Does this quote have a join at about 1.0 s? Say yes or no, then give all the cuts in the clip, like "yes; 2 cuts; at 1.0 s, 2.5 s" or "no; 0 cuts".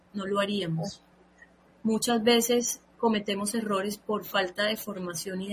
no; 0 cuts